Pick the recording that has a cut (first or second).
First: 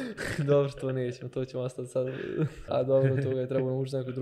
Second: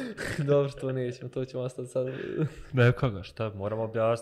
first